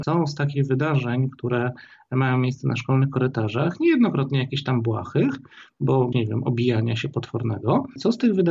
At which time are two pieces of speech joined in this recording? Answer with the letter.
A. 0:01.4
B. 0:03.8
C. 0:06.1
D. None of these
C